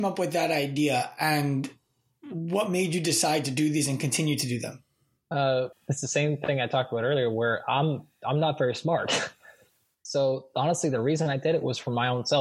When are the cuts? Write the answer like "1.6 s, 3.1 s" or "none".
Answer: 5.7 s